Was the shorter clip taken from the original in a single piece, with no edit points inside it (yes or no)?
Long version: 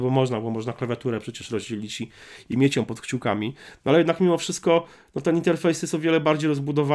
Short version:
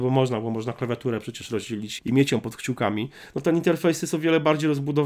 no